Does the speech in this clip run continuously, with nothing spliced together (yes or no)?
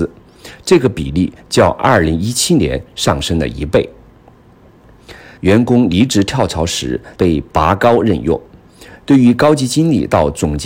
no